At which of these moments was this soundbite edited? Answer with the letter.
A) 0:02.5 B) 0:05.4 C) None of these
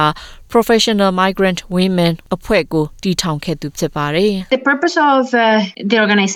C